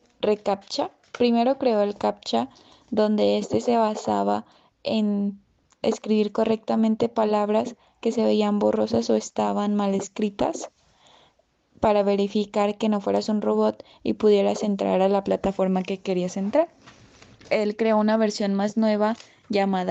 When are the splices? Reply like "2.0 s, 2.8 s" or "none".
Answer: none